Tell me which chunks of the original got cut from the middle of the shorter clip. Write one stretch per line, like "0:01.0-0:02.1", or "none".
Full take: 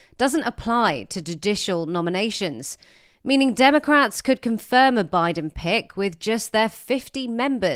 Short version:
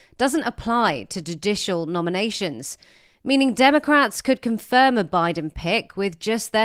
none